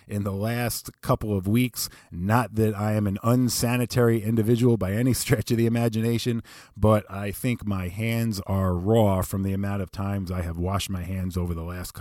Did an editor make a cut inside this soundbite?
no; 0 cuts

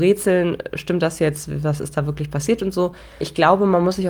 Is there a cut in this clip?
no; 0 cuts

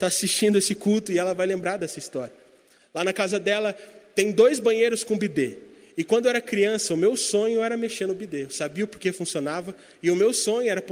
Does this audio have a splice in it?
no; 0 cuts

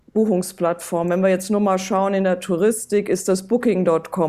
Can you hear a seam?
no; 0 cuts

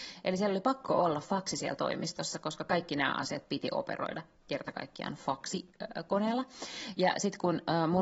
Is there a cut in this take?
no; 0 cuts

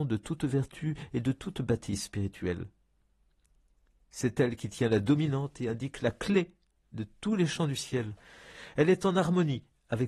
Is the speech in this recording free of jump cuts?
yes; 0 cuts

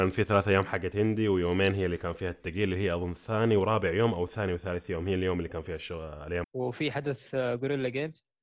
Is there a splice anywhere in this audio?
yes; 1 cut; at 6.4 s

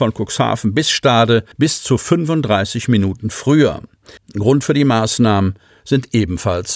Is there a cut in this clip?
yes; 2 cuts; at 1.5 s, 4.2 s

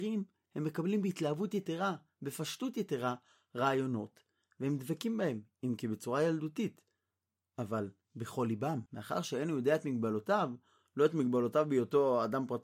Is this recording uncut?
no; 1 cut; at 8.9 s

